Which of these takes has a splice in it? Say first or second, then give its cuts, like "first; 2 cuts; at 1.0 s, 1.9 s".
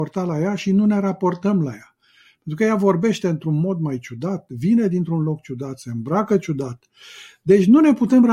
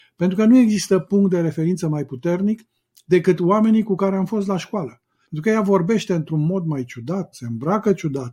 second; 2 cuts; at 5.2 s, 7.3 s